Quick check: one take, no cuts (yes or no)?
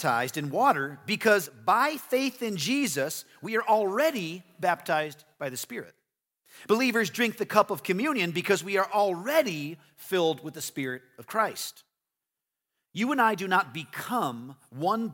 yes